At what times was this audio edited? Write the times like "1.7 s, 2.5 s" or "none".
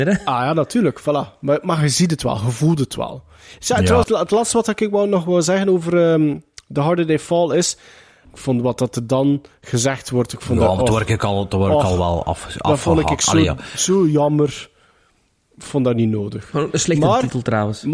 4.0 s, 8.2 s